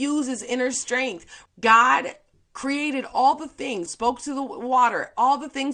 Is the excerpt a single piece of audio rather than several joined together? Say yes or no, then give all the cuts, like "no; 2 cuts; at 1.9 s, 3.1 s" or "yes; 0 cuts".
no; 2 cuts; at 1.5 s, 3.9 s